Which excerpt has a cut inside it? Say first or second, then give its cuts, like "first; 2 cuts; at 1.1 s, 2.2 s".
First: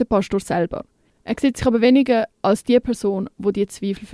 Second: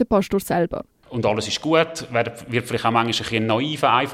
second; 1 cut; at 1.0 s